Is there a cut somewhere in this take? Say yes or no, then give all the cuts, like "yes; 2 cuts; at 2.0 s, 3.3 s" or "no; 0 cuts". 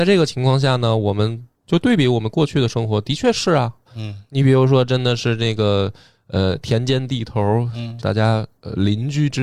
yes; 2 cuts; at 3.9 s, 8.0 s